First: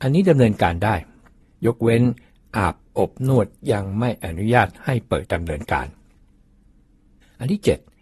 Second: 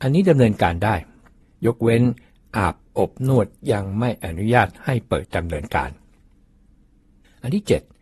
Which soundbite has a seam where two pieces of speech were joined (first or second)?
first